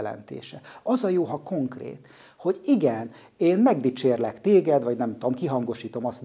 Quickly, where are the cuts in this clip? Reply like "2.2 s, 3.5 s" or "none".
none